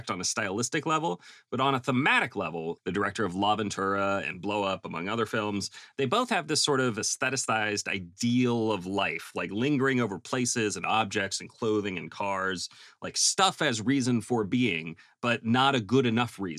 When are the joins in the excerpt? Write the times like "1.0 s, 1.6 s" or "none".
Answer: 2.8 s